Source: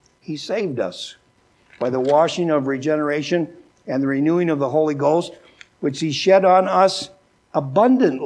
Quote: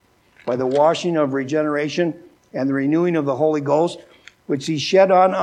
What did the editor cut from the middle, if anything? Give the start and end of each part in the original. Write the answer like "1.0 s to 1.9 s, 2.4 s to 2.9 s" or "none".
none